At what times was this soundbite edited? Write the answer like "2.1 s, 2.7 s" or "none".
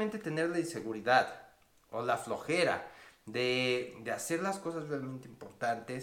none